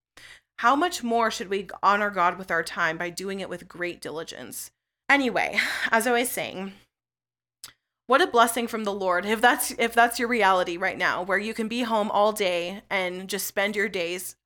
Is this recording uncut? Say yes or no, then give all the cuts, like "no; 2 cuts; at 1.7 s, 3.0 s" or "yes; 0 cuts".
no; 1 cut; at 5.0 s